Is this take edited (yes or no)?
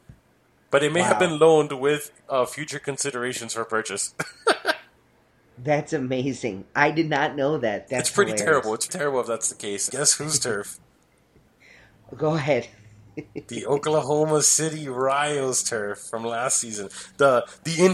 yes